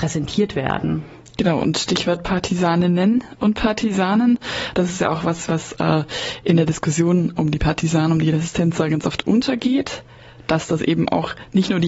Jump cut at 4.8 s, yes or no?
no